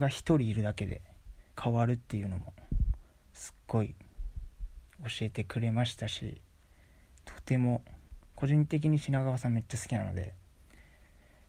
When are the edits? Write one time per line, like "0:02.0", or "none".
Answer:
0:01.5